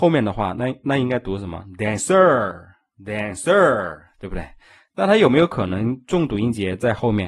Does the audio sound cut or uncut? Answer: uncut